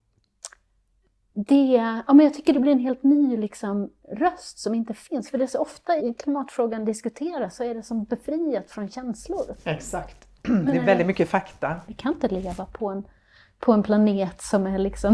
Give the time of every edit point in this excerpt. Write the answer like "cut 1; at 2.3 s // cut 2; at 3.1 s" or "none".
cut 1; at 6.0 s // cut 2; at 11.9 s